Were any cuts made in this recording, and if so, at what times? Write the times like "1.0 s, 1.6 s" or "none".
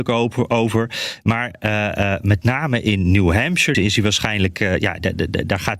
3.7 s